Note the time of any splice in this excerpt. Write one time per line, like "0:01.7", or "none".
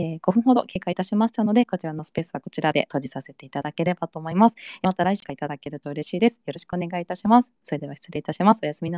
none